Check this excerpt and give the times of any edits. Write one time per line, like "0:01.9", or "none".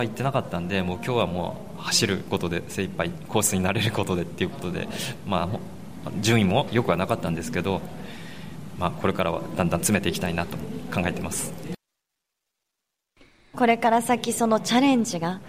0:13.5